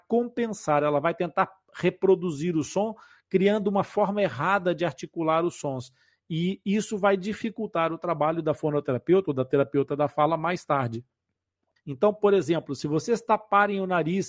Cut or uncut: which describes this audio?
cut